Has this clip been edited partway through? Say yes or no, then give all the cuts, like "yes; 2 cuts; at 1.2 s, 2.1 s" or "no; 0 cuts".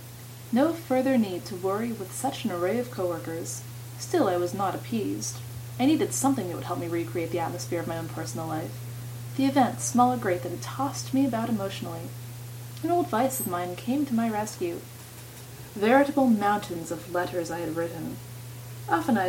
no; 0 cuts